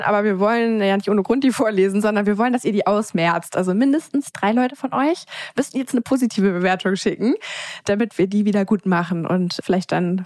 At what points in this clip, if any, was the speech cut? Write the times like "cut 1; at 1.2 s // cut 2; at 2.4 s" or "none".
none